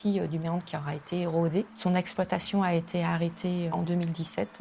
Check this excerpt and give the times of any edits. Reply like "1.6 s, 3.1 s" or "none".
1.7 s, 3.7 s